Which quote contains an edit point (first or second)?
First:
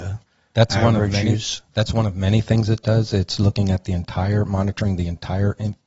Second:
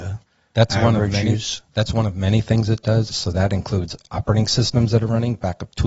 second